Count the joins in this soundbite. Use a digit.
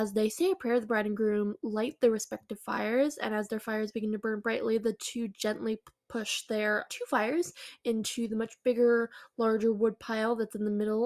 1